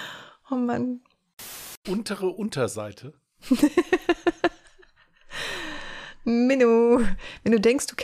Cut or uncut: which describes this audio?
cut